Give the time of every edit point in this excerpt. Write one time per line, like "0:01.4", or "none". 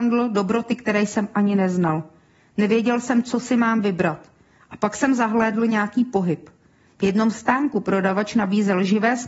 none